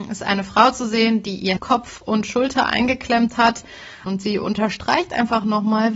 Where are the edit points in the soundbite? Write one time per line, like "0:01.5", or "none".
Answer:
0:01.6
0:04.1